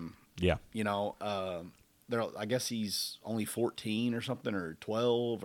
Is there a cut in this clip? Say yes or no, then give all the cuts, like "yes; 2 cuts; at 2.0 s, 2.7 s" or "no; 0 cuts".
no; 0 cuts